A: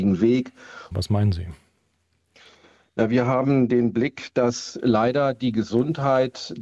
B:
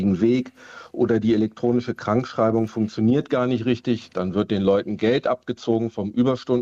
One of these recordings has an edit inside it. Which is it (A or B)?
A